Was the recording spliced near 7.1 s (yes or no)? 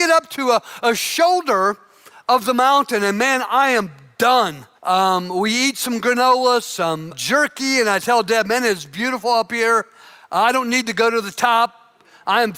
yes